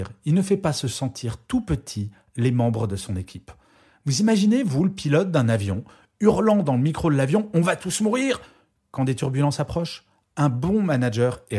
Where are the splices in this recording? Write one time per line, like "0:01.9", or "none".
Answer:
none